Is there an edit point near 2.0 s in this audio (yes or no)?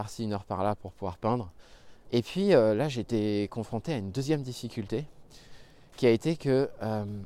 yes